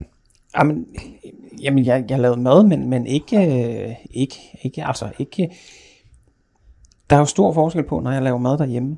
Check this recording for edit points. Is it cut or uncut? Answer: uncut